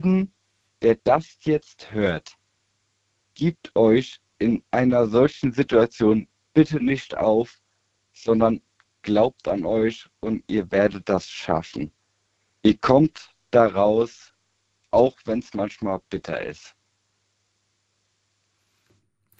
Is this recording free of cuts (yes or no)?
yes